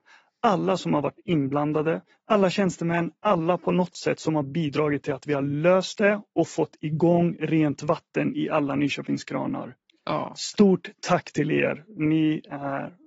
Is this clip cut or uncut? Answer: uncut